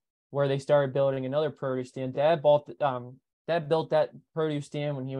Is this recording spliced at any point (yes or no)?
no